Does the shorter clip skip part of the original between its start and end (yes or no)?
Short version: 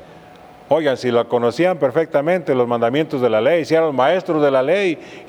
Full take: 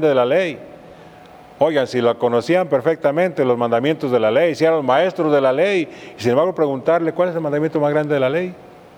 no